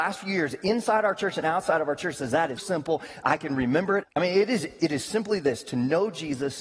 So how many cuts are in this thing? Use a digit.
2